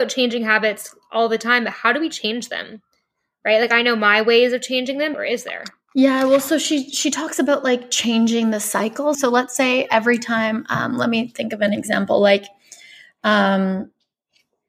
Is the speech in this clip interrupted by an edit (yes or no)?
yes